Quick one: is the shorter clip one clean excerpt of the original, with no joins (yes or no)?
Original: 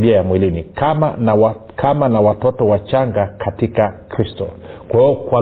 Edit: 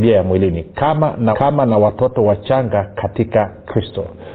no